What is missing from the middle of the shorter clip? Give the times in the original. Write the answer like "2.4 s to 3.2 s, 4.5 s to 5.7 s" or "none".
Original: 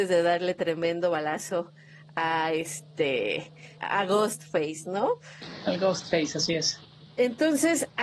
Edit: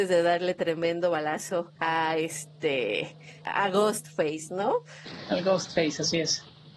1.8 s to 2.1 s